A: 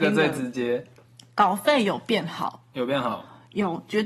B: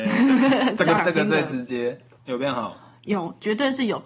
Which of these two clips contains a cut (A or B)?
B